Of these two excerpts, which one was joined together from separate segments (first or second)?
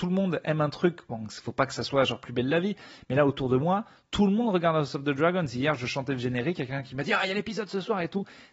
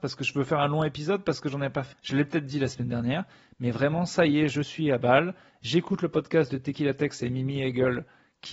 second